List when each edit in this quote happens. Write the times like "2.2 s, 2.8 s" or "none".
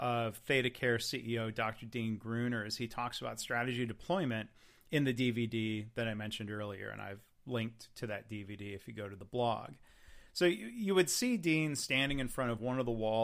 none